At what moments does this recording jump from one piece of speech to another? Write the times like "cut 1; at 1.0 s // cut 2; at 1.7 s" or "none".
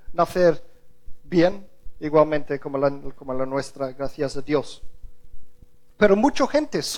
none

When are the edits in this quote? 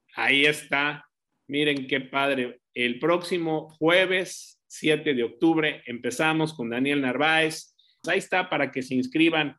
cut 1; at 8.0 s

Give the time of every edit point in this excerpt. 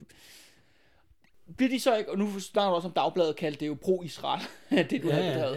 none

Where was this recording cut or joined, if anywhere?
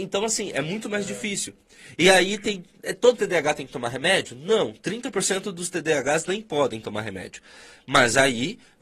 none

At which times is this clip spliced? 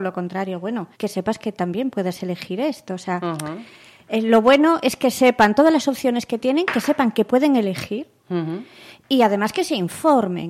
cut 1; at 0.9 s

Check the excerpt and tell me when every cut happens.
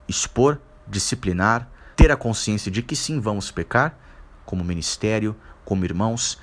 cut 1; at 1.9 s // cut 2; at 4.4 s

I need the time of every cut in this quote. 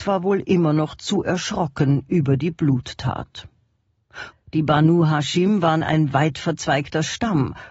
cut 1; at 4.3 s

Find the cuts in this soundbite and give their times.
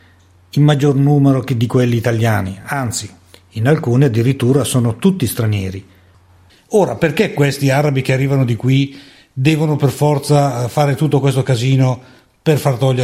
none

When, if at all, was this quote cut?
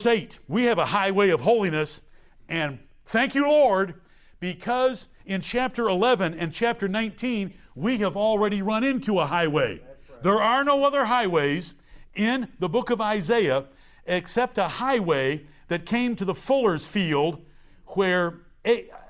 none

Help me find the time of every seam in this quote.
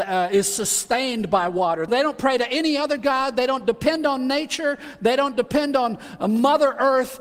cut 1; at 1.9 s

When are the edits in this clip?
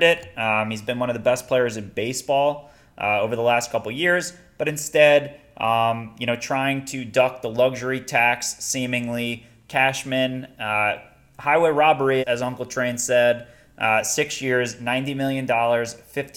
cut 1; at 12.2 s

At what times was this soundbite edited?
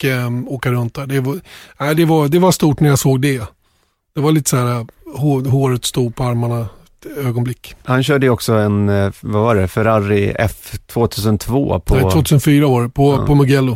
none

